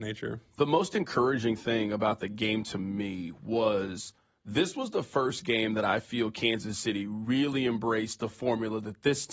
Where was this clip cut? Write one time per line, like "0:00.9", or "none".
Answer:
none